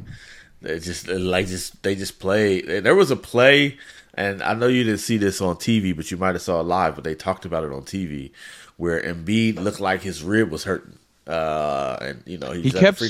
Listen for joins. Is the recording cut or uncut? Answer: uncut